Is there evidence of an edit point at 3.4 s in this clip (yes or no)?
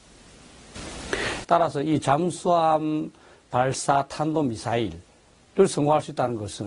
no